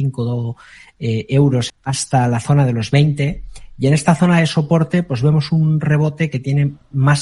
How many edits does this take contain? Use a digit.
1